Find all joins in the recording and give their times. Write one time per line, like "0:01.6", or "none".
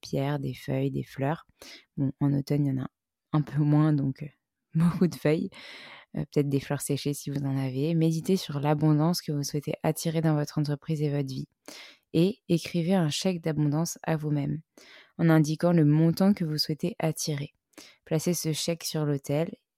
none